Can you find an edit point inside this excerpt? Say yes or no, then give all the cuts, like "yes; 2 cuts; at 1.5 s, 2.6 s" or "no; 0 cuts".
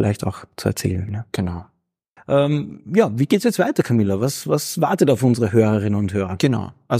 yes; 1 cut; at 2.2 s